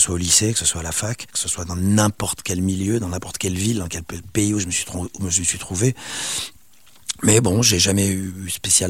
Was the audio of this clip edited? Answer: yes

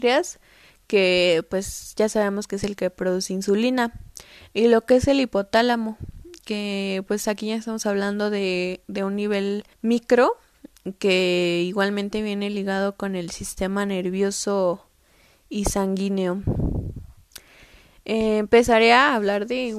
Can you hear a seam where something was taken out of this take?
yes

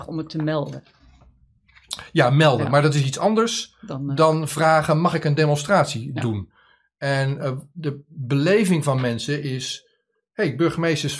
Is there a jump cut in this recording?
no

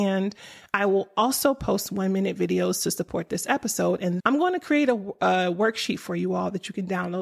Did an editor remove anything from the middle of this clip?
yes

